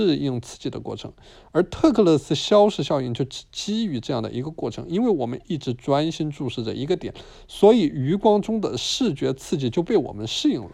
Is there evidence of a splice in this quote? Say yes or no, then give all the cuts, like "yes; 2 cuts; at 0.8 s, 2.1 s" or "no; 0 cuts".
no; 0 cuts